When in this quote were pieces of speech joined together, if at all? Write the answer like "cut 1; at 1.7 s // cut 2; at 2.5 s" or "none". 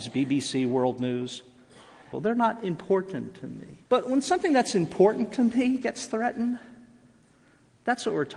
cut 1; at 2.1 s // cut 2; at 3.8 s